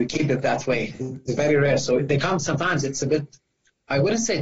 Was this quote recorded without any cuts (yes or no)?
yes